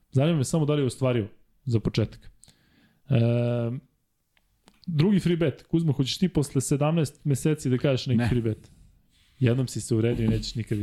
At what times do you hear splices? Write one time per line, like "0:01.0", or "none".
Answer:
none